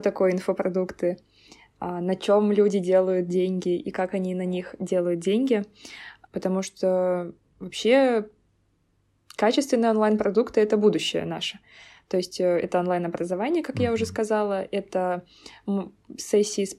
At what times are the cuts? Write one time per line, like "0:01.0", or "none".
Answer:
0:06.3